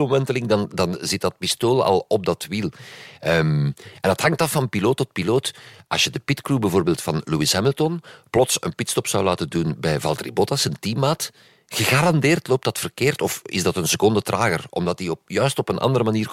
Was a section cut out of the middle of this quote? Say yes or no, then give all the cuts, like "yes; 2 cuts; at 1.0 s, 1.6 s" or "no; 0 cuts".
no; 0 cuts